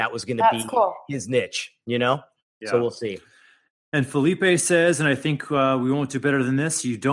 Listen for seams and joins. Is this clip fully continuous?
yes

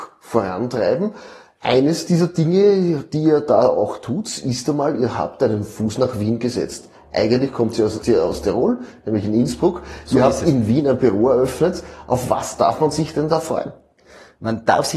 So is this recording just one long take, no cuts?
no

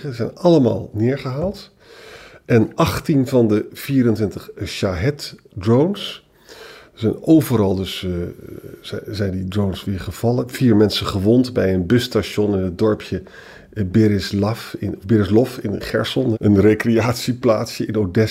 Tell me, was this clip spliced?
yes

